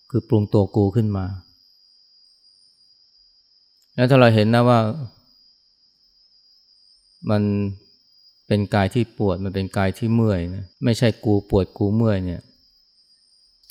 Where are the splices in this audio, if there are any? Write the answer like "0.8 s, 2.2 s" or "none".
10.7 s